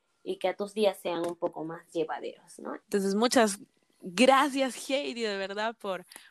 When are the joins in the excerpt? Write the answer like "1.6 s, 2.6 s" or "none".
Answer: 2.8 s